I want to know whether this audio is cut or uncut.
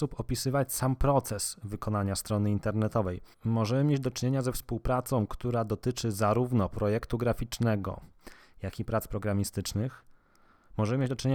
cut